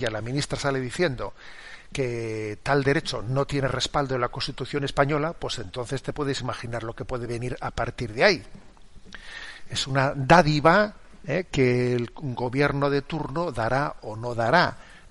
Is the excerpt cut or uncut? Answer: uncut